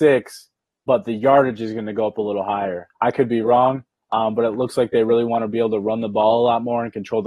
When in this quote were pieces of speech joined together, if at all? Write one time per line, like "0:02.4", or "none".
0:02.9